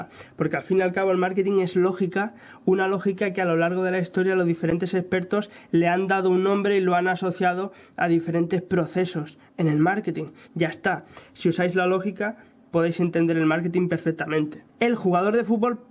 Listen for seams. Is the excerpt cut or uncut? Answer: uncut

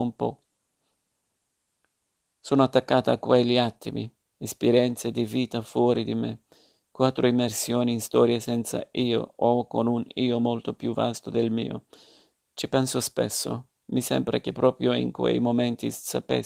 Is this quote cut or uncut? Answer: uncut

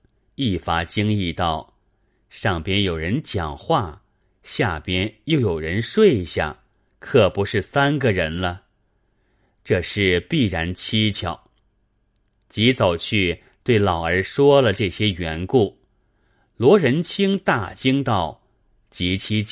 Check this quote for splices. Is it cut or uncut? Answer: cut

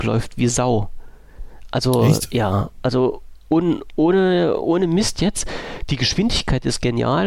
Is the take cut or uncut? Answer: uncut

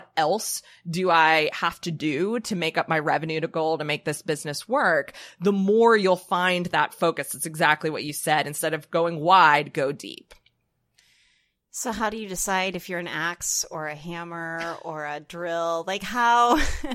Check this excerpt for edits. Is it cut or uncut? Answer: uncut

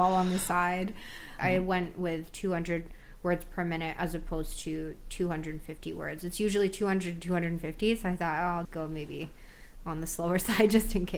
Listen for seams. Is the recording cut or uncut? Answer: cut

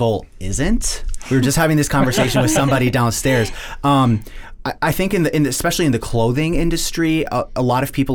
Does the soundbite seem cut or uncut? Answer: uncut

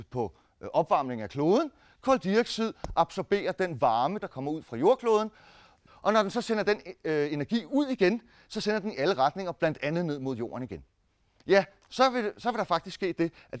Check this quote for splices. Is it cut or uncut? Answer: cut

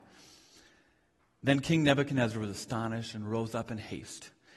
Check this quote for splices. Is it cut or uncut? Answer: uncut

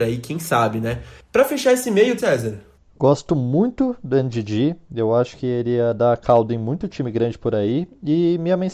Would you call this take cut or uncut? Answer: cut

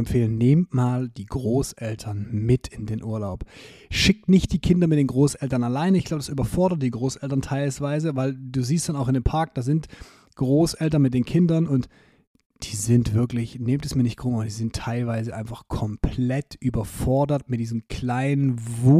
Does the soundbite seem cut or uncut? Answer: uncut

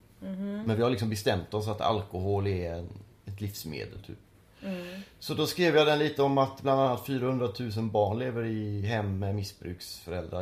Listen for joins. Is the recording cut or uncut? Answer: cut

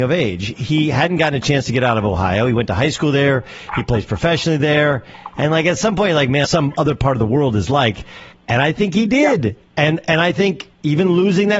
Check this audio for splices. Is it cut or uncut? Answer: cut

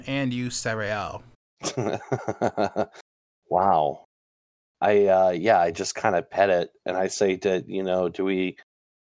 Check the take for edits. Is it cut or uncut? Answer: uncut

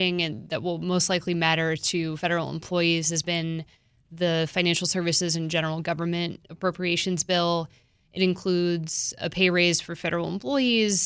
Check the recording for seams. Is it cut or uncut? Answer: uncut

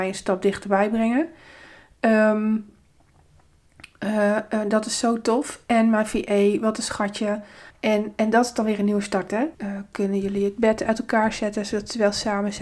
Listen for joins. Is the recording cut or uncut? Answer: cut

